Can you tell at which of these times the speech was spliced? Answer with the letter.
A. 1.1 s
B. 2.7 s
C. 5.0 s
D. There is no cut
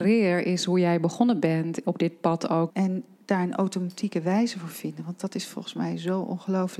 B